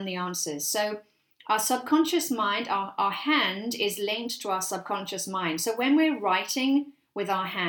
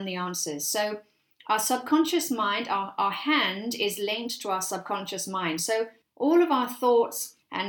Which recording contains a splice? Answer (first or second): second